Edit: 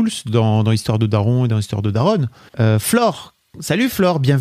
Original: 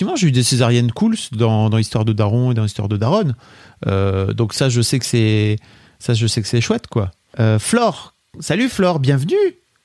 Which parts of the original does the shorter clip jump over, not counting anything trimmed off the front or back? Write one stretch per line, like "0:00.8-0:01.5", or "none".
0:03.5-0:07.3